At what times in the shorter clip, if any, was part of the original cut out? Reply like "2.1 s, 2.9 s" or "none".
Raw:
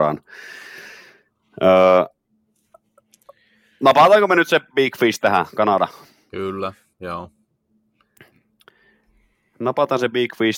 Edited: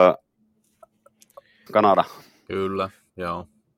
1.7 s